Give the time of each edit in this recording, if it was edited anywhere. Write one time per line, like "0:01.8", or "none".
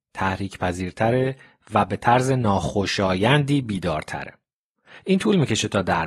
none